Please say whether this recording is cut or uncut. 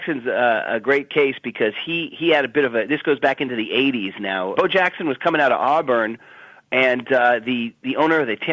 cut